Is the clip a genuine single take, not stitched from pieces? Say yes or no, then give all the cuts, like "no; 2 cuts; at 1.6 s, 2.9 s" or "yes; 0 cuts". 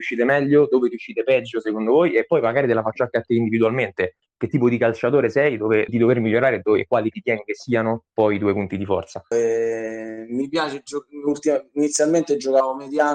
no; 2 cuts; at 5.9 s, 9.3 s